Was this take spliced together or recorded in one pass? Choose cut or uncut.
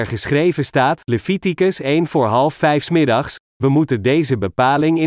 cut